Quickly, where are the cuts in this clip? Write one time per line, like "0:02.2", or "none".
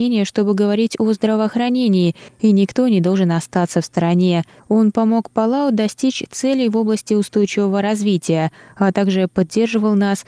0:04.6